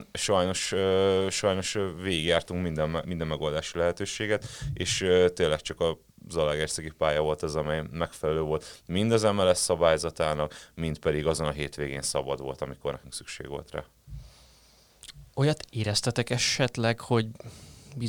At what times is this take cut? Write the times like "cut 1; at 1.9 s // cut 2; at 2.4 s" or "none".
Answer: cut 1; at 3.0 s